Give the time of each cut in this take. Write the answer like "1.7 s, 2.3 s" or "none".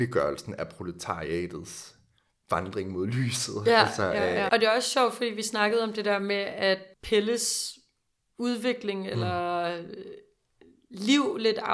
4.5 s